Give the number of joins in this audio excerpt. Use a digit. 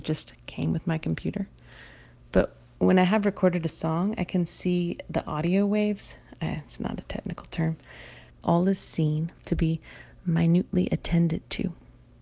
2